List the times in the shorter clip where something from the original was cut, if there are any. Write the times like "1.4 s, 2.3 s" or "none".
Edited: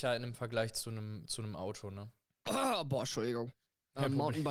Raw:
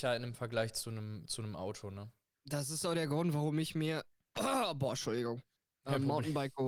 2.3 s

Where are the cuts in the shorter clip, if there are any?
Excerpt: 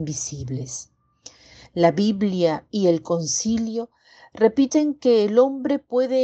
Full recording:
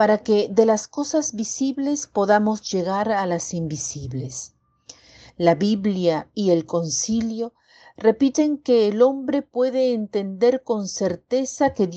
none

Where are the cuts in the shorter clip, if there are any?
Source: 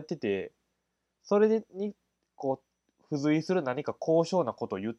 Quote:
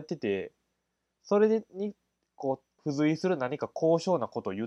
2.8 s

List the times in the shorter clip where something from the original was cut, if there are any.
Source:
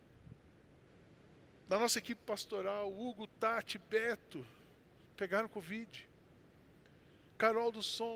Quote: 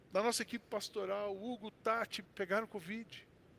2.2 s

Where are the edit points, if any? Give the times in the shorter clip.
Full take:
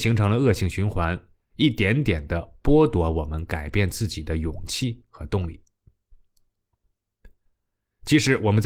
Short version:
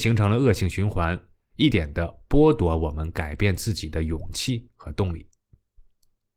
1.7 s

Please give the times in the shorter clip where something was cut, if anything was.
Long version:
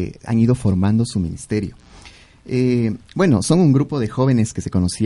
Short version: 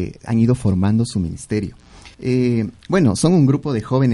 2.1 s

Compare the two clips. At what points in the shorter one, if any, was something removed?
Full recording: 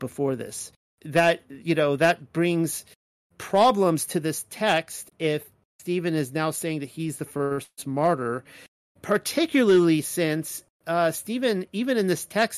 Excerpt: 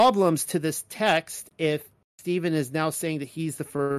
none

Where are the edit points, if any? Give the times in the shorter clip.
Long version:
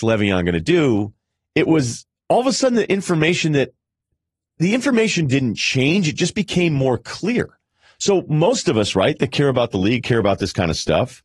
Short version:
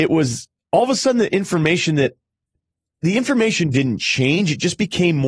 none

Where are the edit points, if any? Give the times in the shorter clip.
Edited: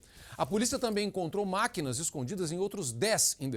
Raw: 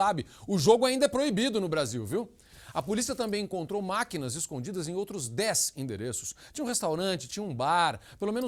none

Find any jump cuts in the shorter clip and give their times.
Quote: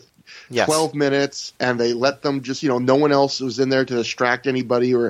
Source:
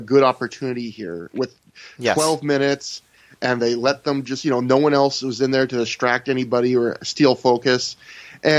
1.6 s

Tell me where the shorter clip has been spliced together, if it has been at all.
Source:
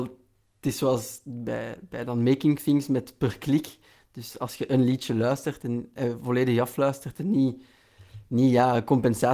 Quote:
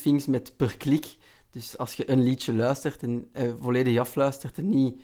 none

